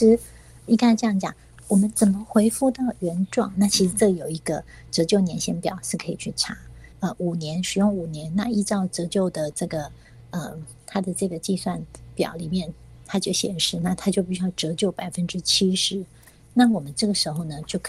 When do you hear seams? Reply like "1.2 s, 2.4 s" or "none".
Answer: 3.5 s, 6.9 s